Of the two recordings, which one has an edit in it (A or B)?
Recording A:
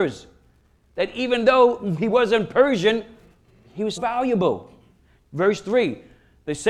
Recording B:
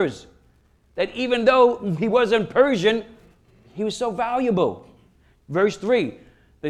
A